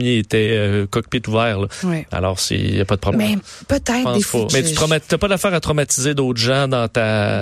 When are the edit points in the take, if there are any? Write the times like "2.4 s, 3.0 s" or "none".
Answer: 3.1 s, 4.5 s